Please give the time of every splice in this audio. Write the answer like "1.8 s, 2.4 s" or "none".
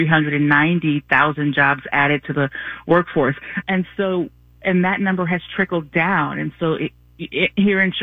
3.6 s